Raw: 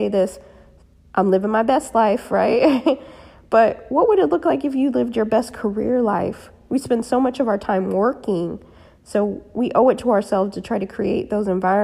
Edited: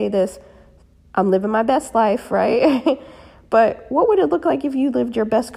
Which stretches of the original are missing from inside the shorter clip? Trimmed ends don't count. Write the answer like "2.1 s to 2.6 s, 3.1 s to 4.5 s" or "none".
none